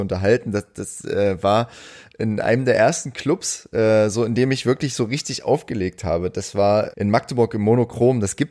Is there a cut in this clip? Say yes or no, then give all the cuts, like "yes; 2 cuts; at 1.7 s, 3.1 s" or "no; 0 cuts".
yes; 1 cut; at 6.9 s